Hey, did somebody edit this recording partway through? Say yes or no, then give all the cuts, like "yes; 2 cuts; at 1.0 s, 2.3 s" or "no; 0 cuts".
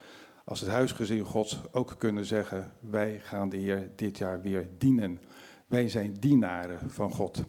no; 0 cuts